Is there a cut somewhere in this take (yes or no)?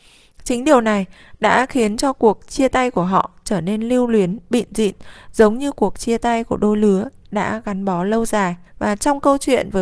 yes